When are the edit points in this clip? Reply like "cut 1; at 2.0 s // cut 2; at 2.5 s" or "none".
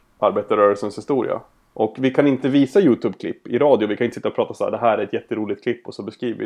none